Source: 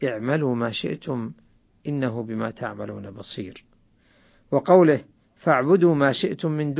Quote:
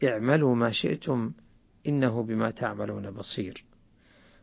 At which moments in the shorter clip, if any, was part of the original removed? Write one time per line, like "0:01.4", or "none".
none